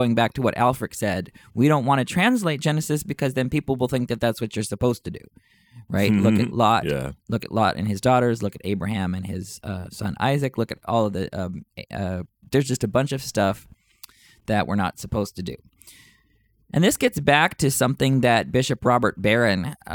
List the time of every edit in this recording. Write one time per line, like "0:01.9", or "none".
none

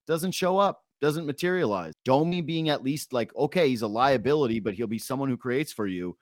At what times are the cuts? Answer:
0:01.9

